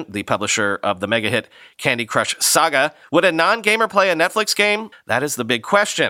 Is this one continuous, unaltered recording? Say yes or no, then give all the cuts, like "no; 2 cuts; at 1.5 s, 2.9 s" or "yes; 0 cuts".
no; 2 cuts; at 3.0 s, 4.9 s